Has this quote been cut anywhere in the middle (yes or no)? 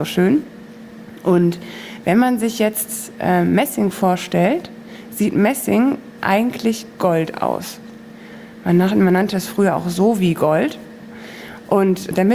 no